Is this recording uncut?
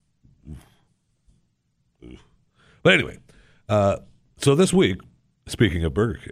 yes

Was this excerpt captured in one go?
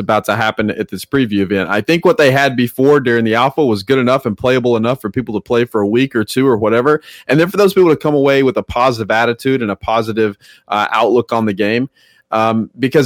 yes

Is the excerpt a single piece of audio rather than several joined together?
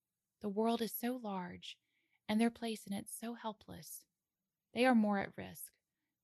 yes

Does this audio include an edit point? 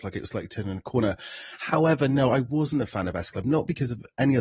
no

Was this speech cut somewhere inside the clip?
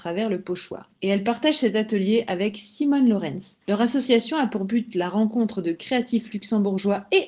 no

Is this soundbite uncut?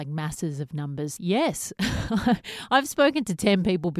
no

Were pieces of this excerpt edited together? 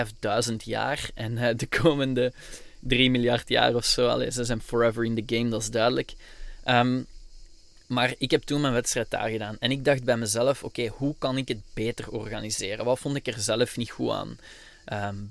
no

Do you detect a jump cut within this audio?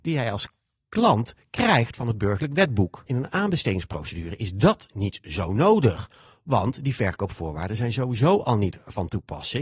yes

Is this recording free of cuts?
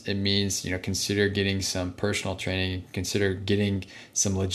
yes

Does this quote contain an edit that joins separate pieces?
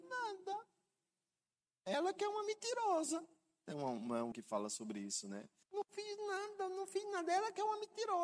yes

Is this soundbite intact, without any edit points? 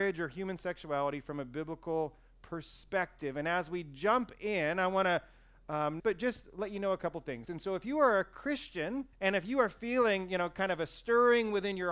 no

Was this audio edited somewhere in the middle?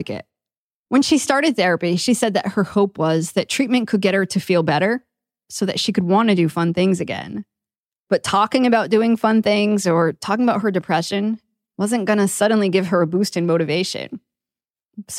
no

